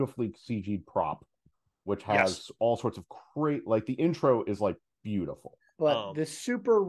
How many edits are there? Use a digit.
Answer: 1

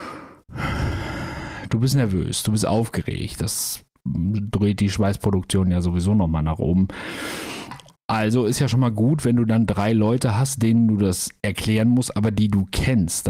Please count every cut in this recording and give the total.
0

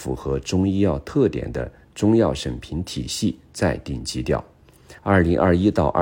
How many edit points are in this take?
1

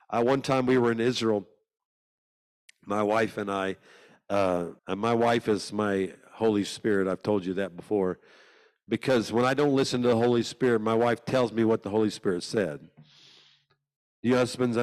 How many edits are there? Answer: 1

